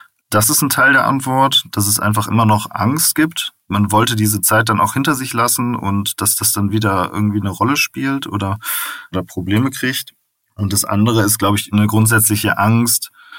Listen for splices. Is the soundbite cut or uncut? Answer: uncut